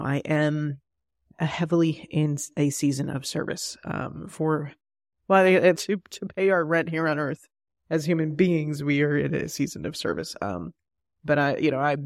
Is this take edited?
yes; 1 cut; at 5.7 s

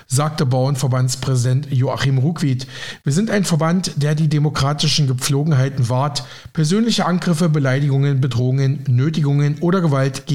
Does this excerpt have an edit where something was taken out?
no; 0 cuts

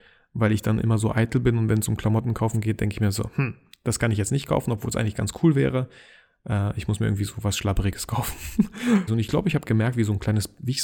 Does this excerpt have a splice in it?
yes; 1 cut; at 9.1 s

